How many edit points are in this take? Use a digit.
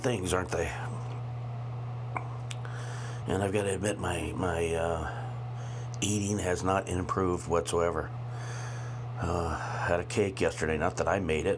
0